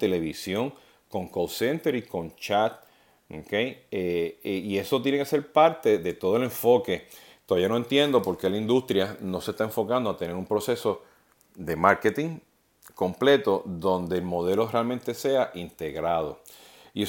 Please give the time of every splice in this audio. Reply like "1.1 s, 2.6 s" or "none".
none